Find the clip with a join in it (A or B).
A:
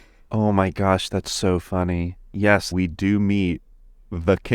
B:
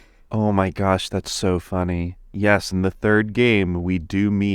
A